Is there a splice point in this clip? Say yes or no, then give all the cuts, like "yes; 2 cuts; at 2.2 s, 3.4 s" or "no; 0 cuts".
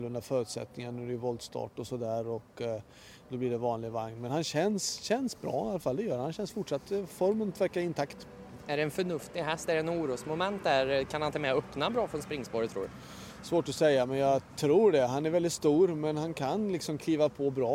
no; 0 cuts